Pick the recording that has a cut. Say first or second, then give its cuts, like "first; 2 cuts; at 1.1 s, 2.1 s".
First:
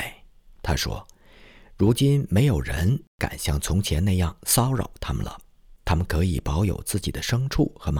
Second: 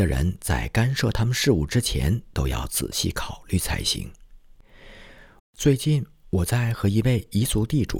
second; 1 cut; at 5.4 s